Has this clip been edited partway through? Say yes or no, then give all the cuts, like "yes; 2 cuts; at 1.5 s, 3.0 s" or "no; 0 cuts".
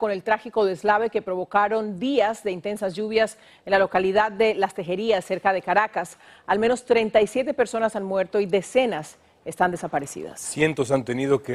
no; 0 cuts